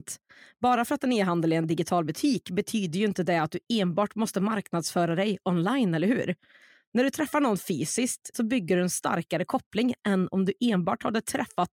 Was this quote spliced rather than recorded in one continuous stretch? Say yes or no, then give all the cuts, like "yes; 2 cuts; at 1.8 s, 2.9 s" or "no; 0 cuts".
yes; 1 cut; at 8.3 s